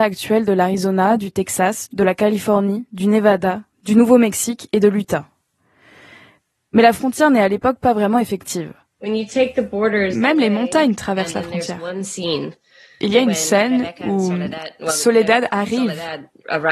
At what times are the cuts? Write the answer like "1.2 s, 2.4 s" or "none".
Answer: 1.9 s, 9.0 s